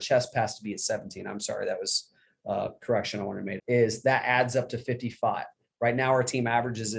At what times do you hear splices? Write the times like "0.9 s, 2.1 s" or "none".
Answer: 3.6 s